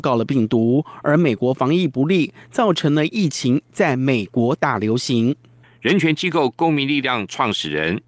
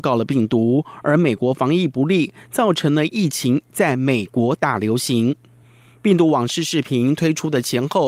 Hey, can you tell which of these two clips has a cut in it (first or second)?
first